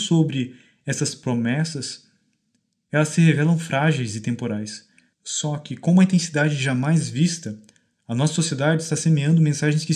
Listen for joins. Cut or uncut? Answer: cut